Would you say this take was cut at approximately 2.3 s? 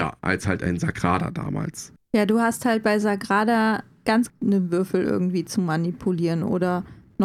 no; 1 cut; at 4.3 s

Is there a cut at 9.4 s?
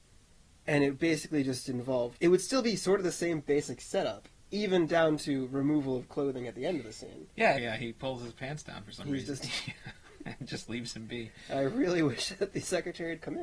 yes; 3 cuts; at 2.1 s, 7.5 s, 9.4 s

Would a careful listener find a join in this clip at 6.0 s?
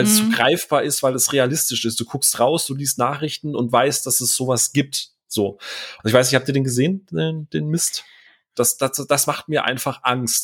yes; 2 cuts; at 6.0 s, 8.5 s

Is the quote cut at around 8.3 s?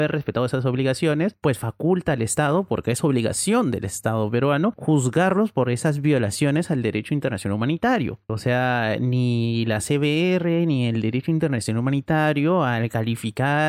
yes; 1 cut; at 8.3 s

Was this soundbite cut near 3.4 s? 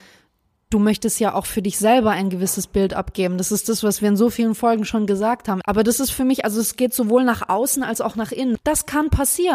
no; 2 cuts; at 5.6 s, 8.6 s

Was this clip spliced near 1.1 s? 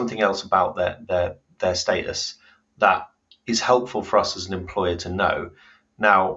no; 0 cuts

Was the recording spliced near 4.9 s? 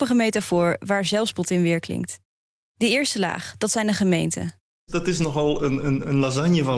yes; 2 cuts; at 2.6 s, 4.9 s

